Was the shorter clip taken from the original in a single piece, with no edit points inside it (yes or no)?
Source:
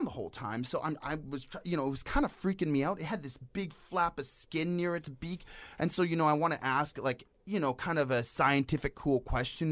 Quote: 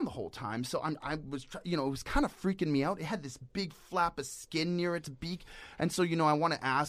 yes